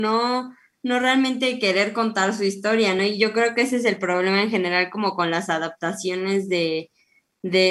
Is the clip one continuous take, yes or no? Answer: yes